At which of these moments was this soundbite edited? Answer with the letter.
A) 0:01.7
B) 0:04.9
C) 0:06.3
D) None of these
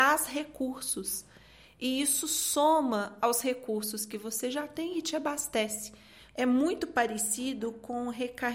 C